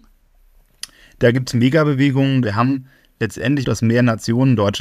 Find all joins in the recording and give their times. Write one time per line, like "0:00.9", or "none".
0:02.4
0:03.6